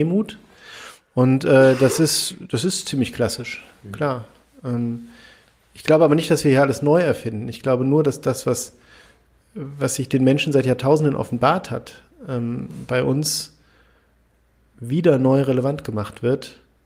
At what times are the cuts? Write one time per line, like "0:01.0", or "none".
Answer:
none